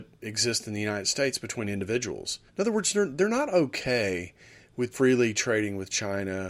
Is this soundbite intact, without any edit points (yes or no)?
no